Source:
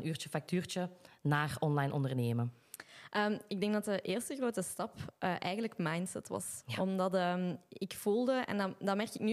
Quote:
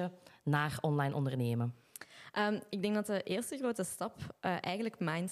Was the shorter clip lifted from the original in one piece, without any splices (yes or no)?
yes